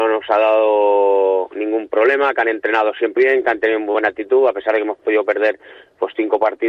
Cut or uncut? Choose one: cut